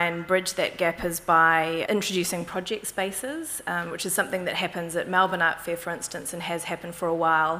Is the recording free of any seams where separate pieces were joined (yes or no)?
no